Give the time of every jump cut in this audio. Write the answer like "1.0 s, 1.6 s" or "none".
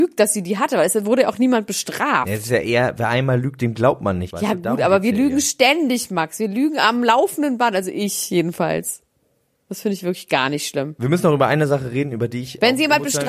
4.3 s